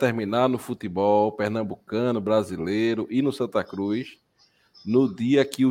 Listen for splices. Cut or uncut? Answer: uncut